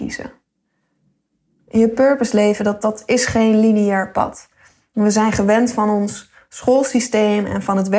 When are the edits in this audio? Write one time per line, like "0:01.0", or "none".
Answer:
none